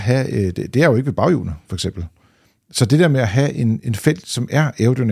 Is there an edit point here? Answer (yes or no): no